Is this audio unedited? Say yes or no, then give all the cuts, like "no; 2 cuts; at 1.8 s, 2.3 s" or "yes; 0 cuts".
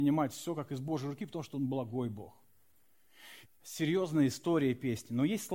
no; 1 cut; at 3.4 s